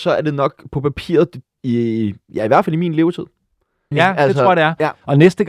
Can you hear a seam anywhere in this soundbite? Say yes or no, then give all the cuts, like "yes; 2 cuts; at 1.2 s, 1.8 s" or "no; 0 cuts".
yes; 2 cuts; at 1.6 s, 3.9 s